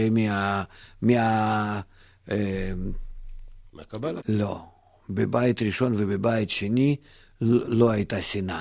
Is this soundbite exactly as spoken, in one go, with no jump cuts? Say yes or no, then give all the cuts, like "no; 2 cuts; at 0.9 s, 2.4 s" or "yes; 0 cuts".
no; 1 cut; at 4.2 s